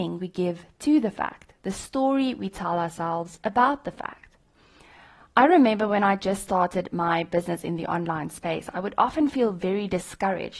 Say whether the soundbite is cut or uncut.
uncut